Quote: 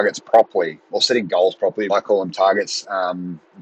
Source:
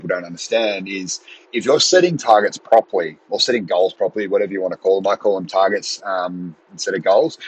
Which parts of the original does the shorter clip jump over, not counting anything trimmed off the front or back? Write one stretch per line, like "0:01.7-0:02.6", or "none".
0:04.3-0:05.0